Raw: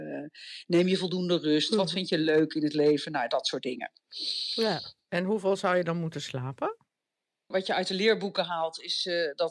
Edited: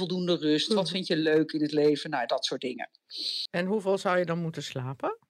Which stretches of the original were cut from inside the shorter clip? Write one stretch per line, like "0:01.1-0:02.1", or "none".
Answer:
0:04.5-0:05.0